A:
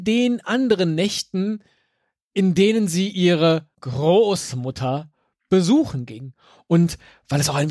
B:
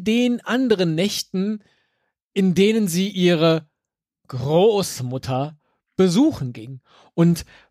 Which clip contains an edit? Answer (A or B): A